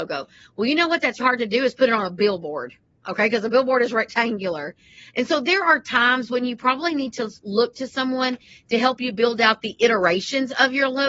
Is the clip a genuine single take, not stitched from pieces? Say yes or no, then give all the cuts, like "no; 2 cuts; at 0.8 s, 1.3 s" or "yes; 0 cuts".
no; 1 cut; at 1.2 s